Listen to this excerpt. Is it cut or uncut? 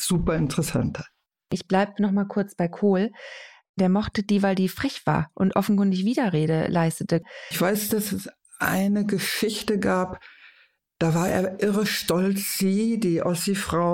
uncut